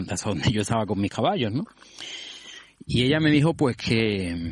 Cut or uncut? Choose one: cut